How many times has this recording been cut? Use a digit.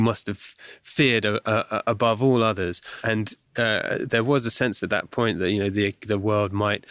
0